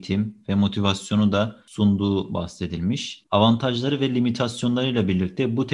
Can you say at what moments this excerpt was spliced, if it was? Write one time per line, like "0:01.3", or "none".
0:03.3